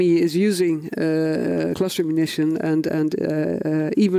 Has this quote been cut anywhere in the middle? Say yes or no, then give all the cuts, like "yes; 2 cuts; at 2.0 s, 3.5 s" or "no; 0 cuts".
no; 0 cuts